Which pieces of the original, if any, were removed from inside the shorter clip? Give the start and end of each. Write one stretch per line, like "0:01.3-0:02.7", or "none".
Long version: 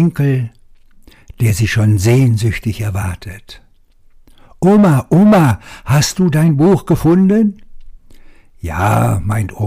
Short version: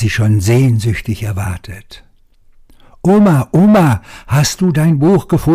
none